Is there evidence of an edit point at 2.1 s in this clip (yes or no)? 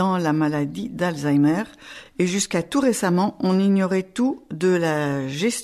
no